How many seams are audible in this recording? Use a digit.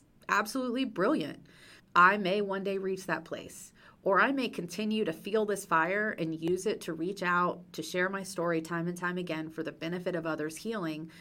1